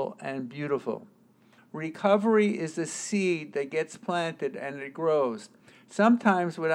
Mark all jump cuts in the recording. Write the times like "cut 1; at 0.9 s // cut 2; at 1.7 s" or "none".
cut 1; at 1.6 s